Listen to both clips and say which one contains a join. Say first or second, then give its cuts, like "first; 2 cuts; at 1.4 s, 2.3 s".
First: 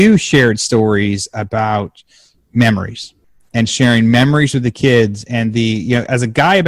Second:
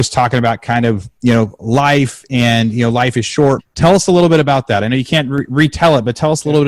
second; 1 cut; at 3.6 s